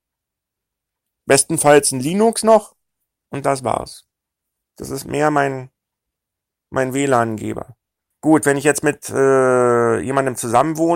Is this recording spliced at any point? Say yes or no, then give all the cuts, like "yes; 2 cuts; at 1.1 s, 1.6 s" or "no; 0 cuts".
yes; 2 cuts; at 4.6 s, 8.1 s